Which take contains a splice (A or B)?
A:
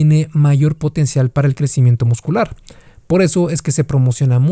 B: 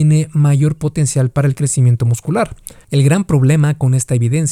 B